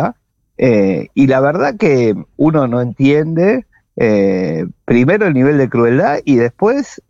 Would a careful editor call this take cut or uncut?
uncut